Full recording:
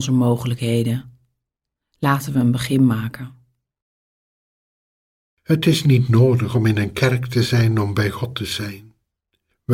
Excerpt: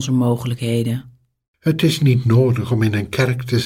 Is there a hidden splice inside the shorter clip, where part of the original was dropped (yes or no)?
yes